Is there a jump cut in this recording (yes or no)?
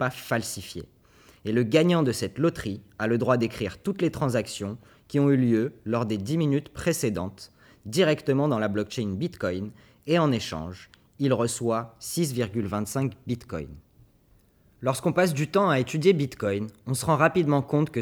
no